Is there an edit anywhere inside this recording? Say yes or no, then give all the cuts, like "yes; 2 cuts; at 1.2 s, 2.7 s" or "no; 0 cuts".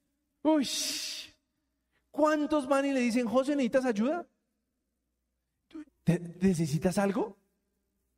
yes; 1 cut; at 5.8 s